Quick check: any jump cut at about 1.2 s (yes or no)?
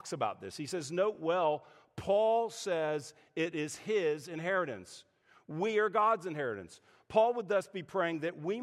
no